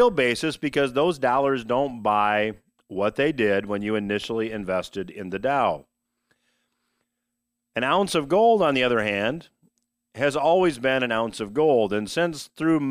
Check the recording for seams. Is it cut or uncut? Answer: uncut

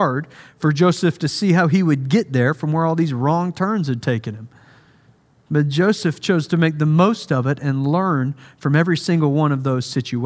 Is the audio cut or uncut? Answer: uncut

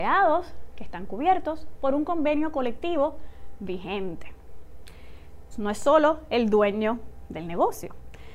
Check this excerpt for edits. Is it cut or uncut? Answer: cut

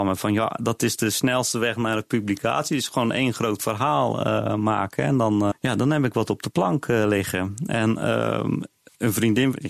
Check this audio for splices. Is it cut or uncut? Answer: cut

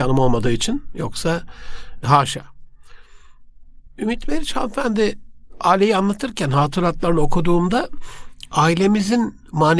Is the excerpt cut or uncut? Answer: uncut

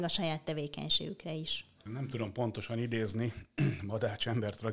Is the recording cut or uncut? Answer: cut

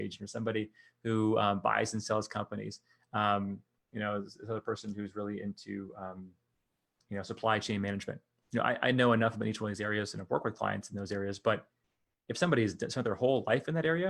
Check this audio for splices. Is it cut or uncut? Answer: uncut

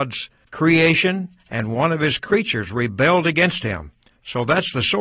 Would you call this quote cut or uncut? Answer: cut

